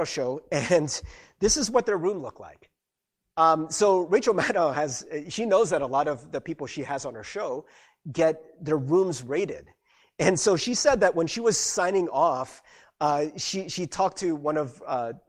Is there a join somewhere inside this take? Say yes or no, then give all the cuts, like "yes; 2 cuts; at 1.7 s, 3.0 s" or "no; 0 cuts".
no; 0 cuts